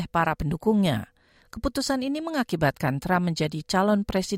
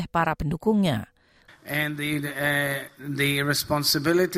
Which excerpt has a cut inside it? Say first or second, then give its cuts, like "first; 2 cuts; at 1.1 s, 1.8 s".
second; 1 cut; at 1.5 s